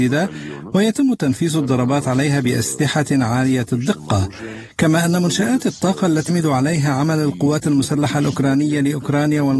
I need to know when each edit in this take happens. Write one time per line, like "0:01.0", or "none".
0:06.3